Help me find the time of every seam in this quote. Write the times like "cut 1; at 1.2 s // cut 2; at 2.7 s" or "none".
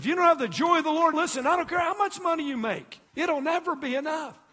cut 1; at 1.1 s // cut 2; at 3.1 s